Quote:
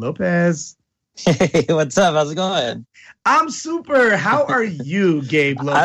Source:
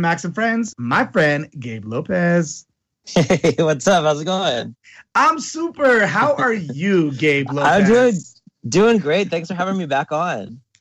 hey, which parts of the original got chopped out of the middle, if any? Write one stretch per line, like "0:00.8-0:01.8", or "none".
none